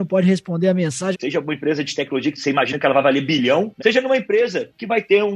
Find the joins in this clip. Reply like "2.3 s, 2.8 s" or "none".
1.1 s, 3.8 s